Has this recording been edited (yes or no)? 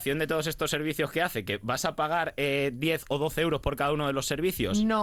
no